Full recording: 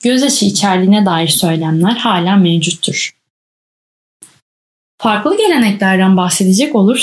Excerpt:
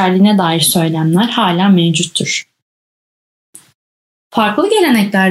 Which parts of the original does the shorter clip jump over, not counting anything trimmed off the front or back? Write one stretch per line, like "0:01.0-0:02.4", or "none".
none

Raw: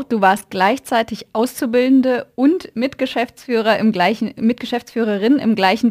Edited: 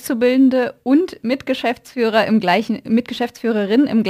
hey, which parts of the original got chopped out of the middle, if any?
none

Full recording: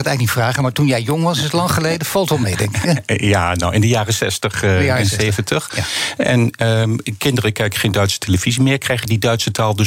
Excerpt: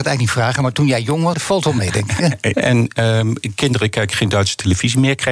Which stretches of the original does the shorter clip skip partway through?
0:01.3-0:02.0
0:03.2-0:06.2

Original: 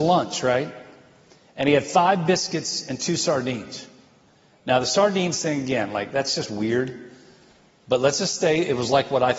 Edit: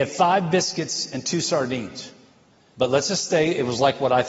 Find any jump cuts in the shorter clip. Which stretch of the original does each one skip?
0:04.5-0:07.8

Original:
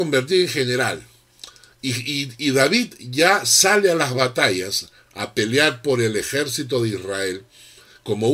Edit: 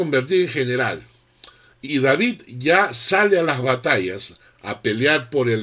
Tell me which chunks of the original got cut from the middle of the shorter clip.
0:01.8-0:02.4

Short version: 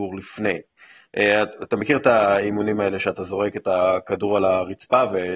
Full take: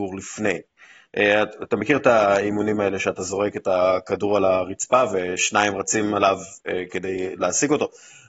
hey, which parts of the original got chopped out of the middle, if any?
none

